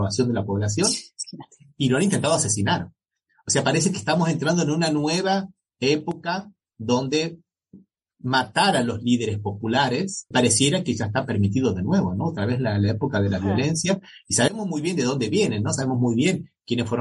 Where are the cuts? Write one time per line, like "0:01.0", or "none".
0:10.3